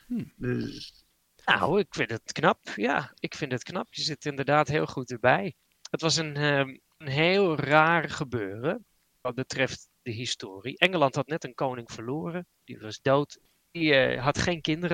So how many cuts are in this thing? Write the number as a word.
zero